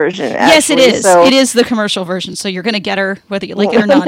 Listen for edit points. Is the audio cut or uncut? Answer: uncut